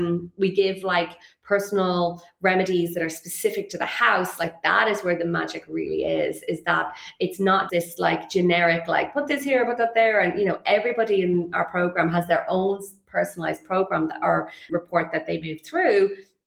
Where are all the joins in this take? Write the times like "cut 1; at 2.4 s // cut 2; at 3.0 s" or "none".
cut 1; at 7.7 s // cut 2; at 14.7 s

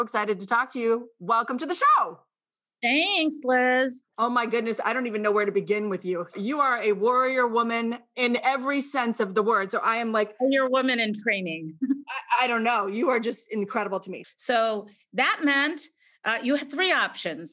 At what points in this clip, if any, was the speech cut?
cut 1; at 14.2 s

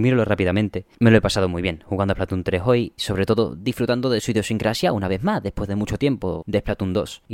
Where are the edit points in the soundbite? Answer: cut 1; at 3.0 s // cut 2; at 6.4 s

